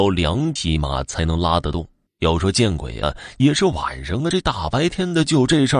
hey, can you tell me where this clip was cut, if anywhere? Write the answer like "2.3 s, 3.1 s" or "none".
2.1 s